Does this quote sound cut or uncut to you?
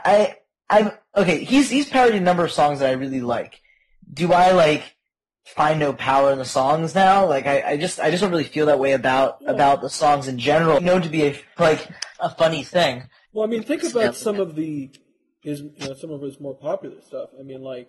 cut